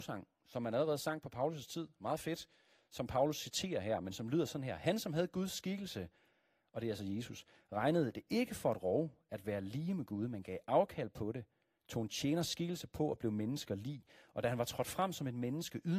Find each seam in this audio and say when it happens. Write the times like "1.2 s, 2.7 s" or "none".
none